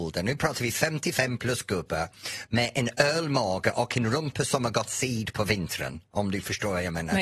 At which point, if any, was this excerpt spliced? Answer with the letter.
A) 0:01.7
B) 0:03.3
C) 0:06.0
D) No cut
D